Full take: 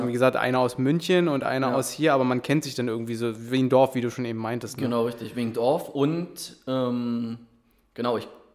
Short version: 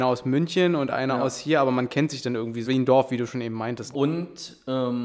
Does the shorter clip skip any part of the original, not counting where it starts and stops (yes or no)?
yes